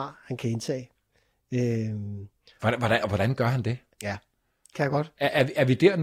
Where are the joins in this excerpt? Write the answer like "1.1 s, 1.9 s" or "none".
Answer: 3.9 s